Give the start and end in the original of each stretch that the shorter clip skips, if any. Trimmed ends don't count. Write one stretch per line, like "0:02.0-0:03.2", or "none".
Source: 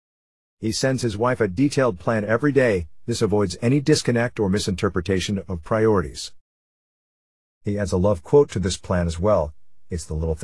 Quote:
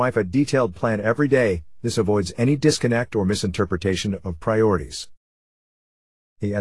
none